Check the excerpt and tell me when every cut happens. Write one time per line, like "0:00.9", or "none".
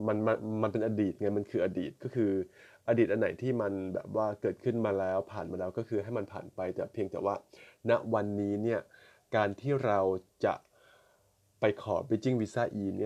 none

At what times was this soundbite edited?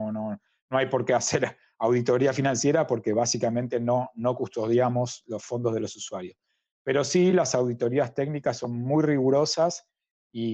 none

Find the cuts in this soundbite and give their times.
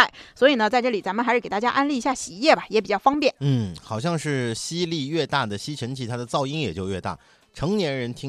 none

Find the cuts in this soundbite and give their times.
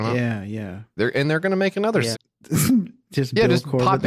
0:01.0
0:02.1

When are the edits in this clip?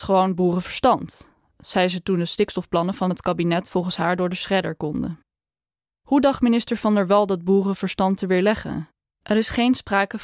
0:09.1

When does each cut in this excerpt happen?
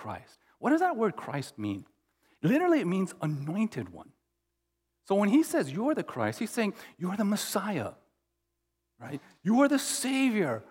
none

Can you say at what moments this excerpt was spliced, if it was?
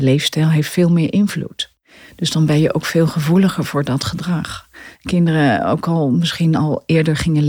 0:04.9

